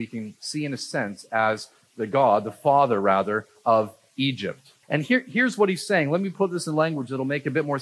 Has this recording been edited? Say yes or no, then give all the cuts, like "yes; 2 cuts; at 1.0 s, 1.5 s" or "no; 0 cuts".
yes; 1 cut; at 4.8 s